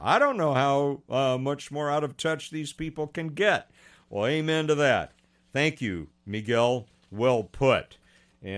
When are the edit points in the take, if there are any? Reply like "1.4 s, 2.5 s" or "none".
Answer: none